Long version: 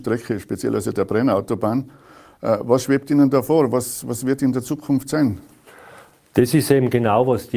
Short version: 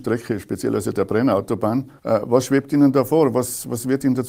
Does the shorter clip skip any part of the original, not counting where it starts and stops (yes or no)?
yes